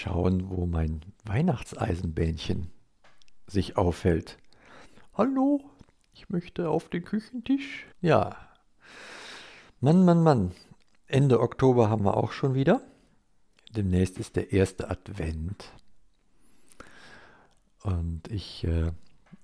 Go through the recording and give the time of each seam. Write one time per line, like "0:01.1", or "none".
0:05.1
0:07.9